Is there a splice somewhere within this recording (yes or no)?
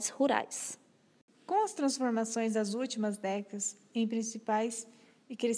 no